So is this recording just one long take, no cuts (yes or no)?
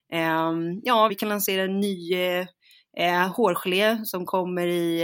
no